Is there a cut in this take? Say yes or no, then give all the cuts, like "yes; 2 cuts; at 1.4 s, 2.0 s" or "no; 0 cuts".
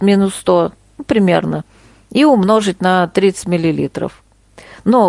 no; 0 cuts